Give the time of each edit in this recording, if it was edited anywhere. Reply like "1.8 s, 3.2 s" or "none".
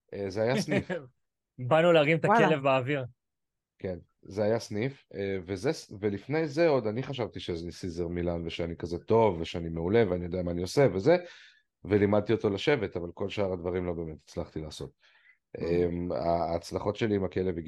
none